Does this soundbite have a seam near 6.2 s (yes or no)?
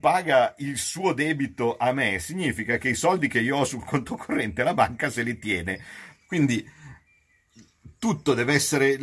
yes